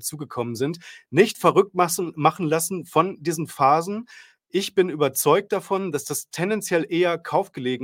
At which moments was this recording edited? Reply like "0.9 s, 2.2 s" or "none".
4.4 s

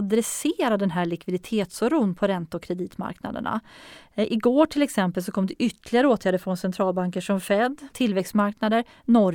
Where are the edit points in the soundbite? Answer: 7.9 s

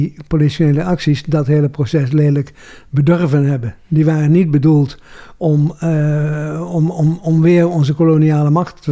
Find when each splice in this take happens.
none

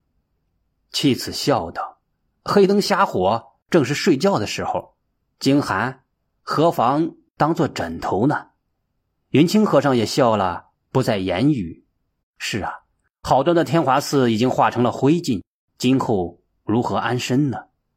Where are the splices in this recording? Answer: 12.2 s

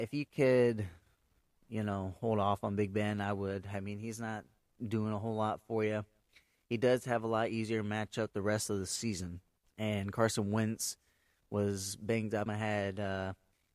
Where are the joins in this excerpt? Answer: 9.6 s, 12.5 s

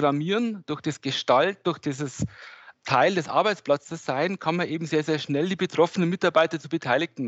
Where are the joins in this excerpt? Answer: 2.7 s

